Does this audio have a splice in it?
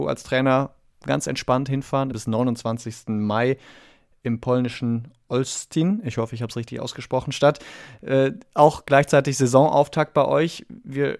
yes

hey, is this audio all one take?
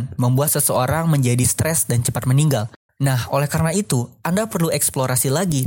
no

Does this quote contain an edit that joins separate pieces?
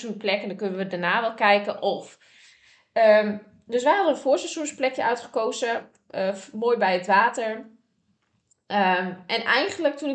no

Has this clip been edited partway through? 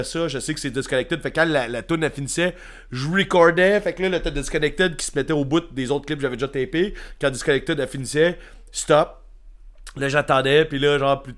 no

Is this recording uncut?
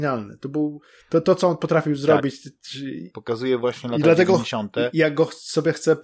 no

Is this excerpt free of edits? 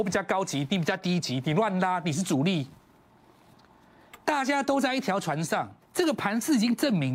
no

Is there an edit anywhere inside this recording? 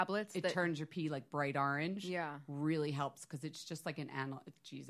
no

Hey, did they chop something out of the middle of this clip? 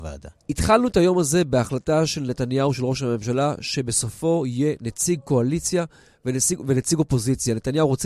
no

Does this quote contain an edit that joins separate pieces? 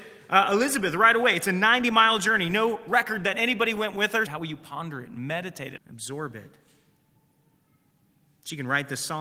yes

